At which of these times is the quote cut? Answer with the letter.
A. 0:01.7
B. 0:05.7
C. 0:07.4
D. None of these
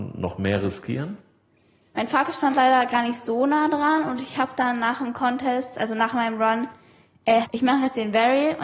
C